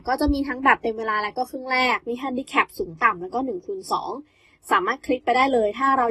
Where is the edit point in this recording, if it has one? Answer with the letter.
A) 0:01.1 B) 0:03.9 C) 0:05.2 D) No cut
D